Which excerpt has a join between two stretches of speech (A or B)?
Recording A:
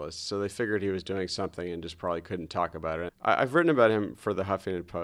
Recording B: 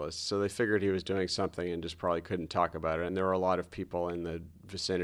A